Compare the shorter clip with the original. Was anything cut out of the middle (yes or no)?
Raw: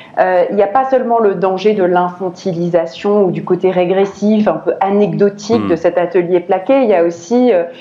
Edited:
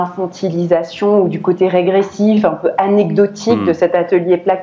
no